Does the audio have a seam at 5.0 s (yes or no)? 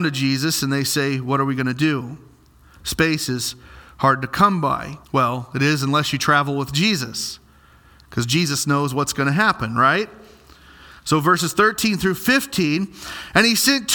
yes